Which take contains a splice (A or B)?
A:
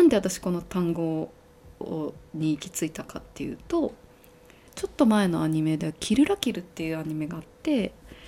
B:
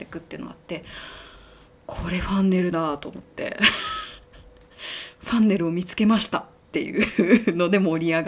A